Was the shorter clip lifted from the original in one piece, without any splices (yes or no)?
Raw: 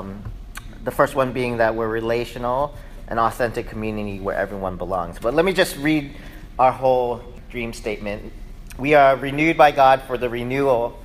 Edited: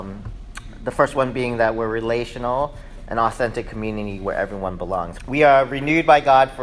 no